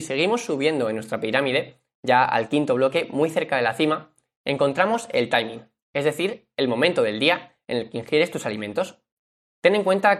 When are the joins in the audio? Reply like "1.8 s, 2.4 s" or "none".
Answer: none